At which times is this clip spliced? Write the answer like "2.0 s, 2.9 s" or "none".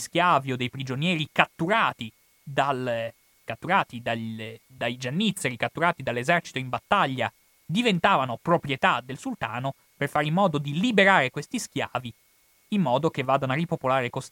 none